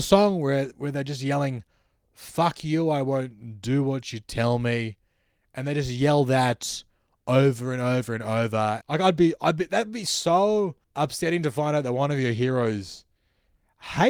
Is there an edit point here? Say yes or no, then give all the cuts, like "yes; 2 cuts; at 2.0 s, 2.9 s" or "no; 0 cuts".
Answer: yes; 2 cuts; at 8.8 s, 10.8 s